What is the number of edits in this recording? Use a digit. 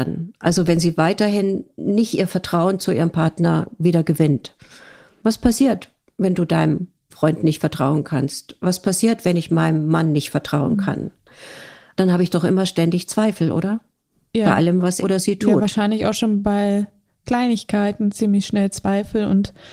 1